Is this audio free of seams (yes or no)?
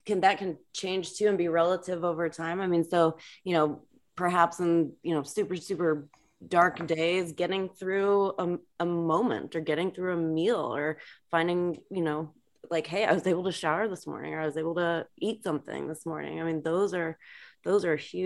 yes